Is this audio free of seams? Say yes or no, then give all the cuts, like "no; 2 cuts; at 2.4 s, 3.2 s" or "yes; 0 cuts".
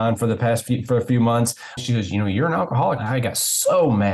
no; 2 cuts; at 1.8 s, 3.0 s